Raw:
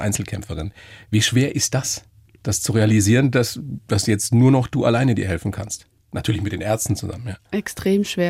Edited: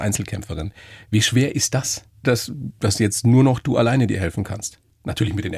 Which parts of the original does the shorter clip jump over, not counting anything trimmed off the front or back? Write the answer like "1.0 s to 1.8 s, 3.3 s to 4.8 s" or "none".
2.2 s to 3.3 s

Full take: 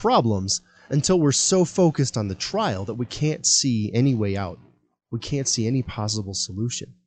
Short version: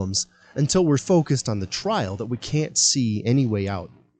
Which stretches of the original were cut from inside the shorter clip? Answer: 1.3 s to 1.7 s

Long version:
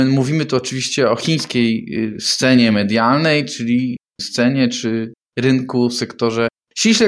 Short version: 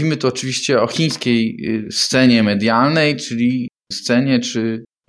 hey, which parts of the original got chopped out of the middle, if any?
none

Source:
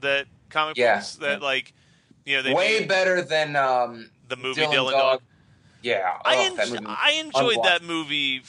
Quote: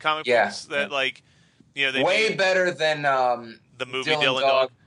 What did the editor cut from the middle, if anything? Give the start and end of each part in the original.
none

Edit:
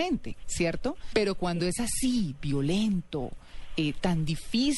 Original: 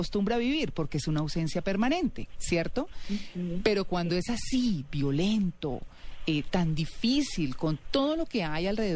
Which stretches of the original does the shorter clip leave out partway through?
3.0 s to 3.6 s

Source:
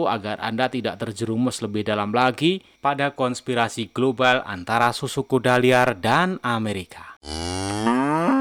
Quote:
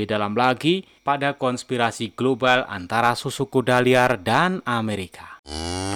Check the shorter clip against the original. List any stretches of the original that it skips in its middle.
none

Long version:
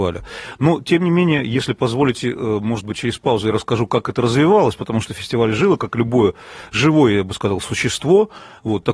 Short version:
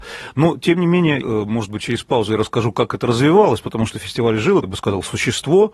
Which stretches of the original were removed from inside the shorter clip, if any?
1.4 s to 2.4 s, 5.8 s to 7.2 s

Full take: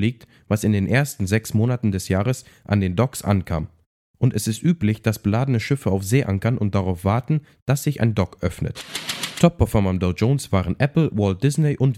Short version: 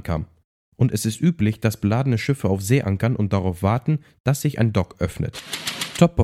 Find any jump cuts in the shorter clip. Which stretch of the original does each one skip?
none

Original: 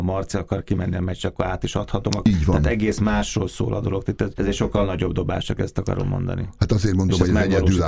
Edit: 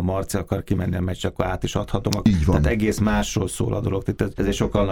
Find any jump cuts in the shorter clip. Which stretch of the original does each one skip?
none

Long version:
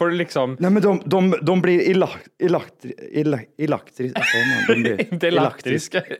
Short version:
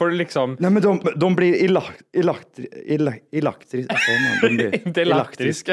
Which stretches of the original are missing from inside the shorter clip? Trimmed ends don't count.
1.0 s to 1.3 s

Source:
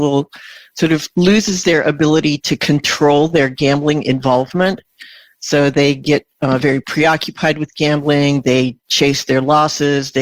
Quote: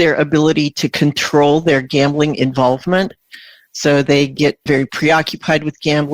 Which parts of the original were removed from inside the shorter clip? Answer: 6.3 s to 6.6 s

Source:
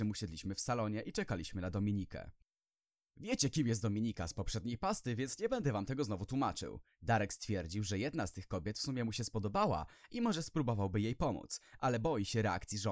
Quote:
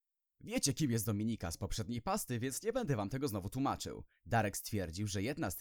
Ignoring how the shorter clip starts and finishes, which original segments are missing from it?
none

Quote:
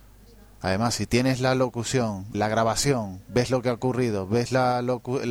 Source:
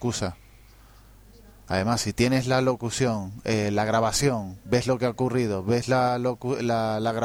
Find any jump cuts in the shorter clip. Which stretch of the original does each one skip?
3.4 s to 3.7 s

